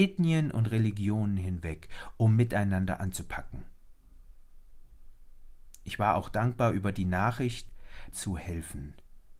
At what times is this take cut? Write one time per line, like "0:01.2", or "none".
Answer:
0:08.1

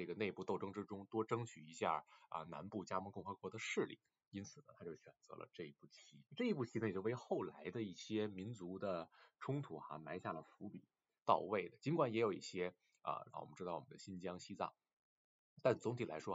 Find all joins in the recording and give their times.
0:06.3
0:11.2
0:13.3

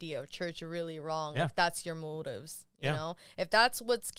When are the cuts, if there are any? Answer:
none

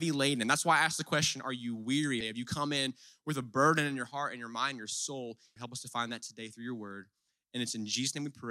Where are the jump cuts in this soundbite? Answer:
0:02.2
0:05.6

